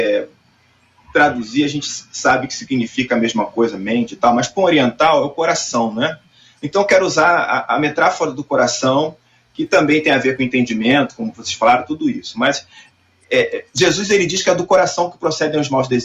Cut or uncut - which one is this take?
uncut